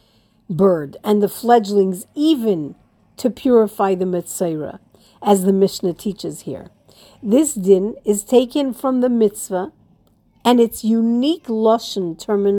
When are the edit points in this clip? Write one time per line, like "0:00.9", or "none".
none